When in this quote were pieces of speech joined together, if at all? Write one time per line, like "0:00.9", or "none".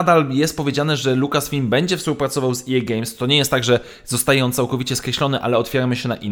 none